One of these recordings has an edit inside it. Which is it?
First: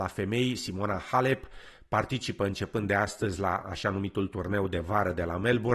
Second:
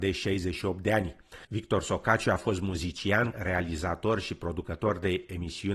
second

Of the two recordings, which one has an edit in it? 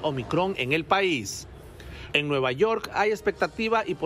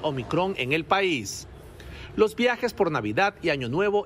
first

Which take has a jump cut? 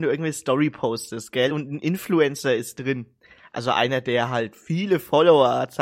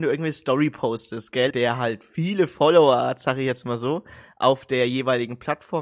second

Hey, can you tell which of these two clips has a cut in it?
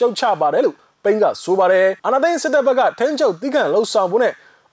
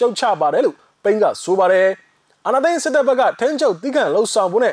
first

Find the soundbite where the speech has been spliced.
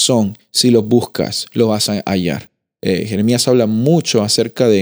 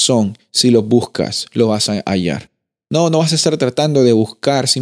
first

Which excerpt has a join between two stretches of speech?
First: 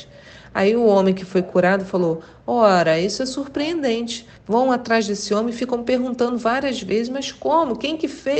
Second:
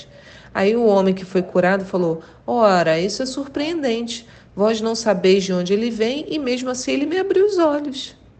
first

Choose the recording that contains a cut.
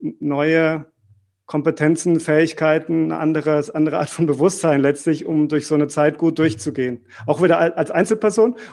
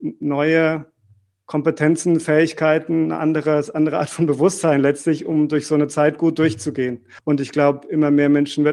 second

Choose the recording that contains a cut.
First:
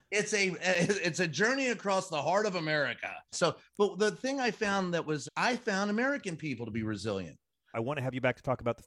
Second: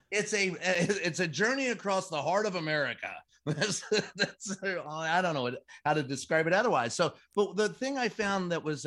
first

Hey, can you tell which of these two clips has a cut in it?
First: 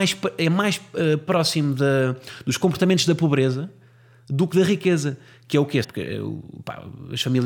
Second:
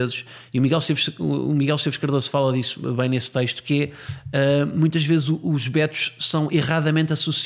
first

